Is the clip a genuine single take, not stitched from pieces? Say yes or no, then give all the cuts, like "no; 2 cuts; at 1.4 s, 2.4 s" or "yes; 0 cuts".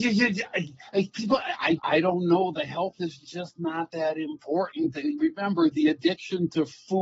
no; 1 cut; at 1.8 s